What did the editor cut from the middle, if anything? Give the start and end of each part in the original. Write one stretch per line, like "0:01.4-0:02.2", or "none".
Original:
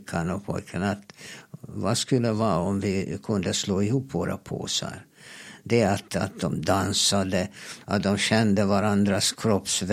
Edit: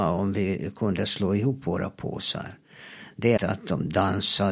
0:05.8-0:06.1